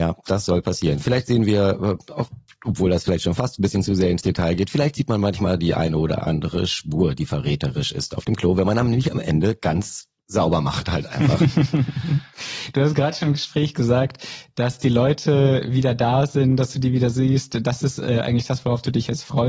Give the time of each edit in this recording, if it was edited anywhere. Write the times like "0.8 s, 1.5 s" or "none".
none